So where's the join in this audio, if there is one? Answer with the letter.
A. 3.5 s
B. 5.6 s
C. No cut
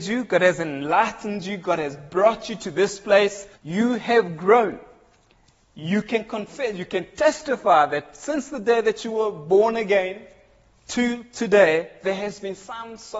A